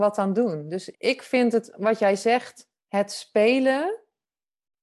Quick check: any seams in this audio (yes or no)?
yes